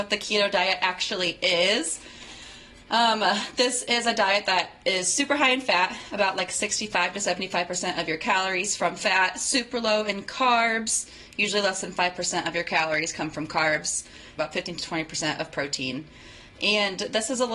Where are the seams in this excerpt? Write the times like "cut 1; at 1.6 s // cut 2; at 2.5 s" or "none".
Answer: cut 1; at 14.4 s